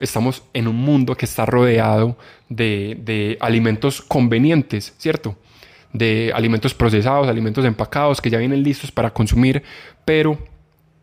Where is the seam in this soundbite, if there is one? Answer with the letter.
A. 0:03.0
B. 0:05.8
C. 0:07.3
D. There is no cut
D